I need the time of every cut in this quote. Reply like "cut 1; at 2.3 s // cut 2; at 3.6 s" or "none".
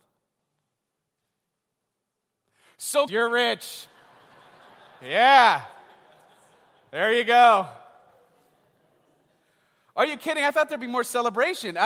cut 1; at 3.1 s